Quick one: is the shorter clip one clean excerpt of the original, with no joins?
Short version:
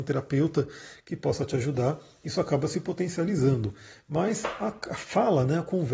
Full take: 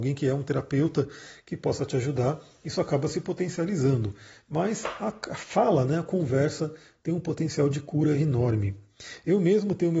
yes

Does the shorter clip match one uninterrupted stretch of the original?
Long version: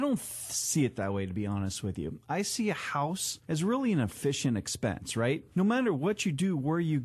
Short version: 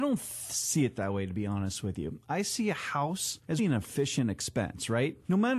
no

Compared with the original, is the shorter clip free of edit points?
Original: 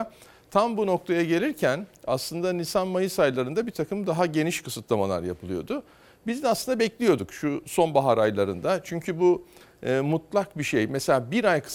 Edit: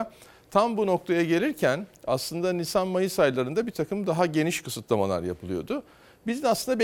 yes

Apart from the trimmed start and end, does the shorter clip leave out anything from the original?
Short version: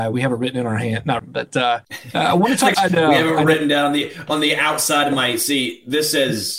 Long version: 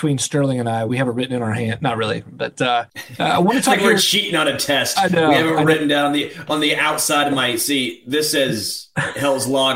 yes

